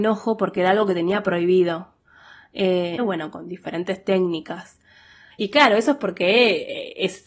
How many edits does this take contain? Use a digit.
2